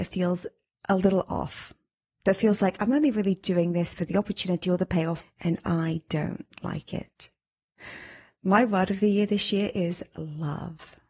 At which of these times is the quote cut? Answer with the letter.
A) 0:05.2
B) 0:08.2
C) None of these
A